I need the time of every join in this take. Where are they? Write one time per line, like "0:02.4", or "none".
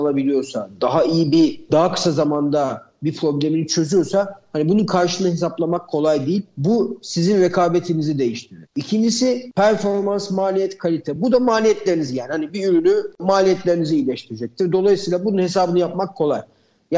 none